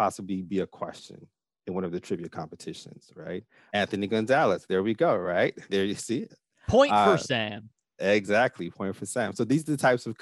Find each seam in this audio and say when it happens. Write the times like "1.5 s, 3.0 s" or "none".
3.7 s